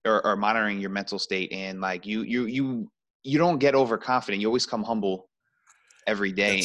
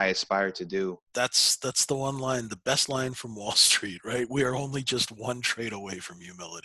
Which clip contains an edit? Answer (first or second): second